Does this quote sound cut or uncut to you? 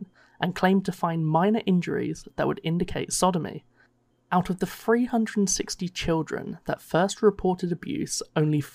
cut